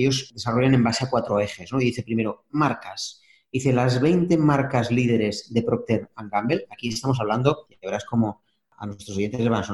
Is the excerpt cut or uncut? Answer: uncut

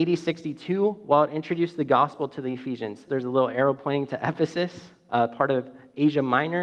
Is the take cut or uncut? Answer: cut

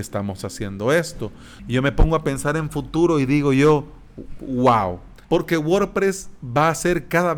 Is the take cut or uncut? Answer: cut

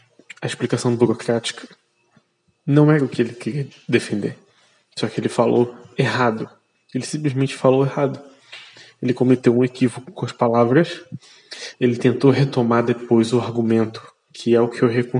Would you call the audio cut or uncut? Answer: cut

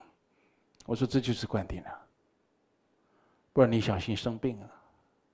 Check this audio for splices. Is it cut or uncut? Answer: uncut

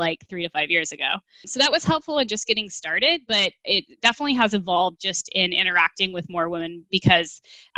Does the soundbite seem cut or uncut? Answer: uncut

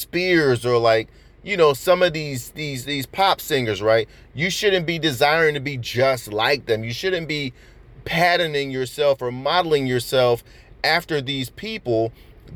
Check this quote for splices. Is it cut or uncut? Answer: uncut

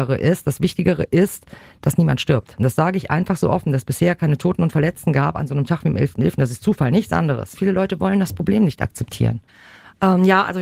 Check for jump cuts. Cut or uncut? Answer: uncut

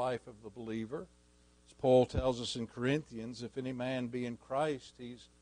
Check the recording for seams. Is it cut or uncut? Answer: cut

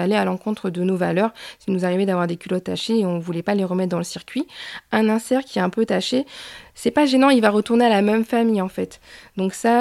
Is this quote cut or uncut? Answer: uncut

